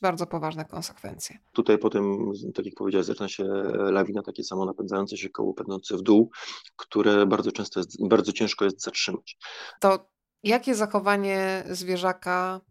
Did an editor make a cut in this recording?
yes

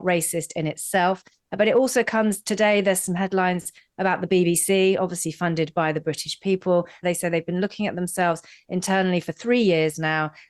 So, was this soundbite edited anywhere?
yes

